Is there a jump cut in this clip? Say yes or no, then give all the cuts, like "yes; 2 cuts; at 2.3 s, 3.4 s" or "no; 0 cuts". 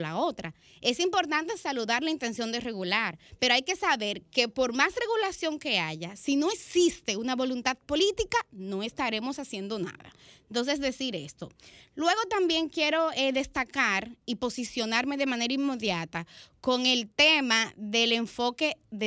no; 0 cuts